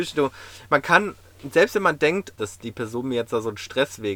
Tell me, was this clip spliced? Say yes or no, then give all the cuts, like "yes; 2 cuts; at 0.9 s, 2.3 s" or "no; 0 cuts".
yes; 1 cut; at 2.4 s